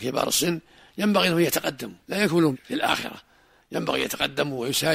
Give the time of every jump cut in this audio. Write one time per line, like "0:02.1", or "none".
0:02.0